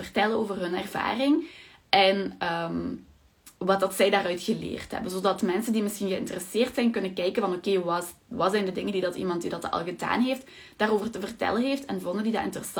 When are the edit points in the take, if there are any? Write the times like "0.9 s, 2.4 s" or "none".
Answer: 3.6 s